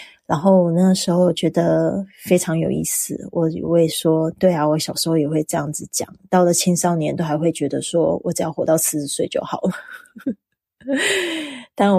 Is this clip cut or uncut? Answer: uncut